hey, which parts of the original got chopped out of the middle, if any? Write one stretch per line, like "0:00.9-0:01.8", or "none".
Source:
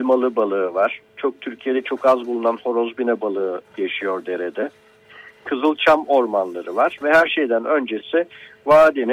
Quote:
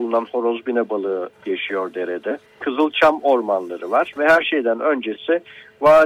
0:04.8-0:05.3